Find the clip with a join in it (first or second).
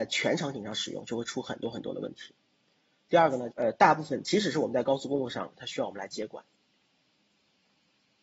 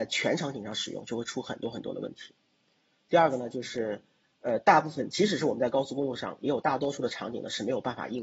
first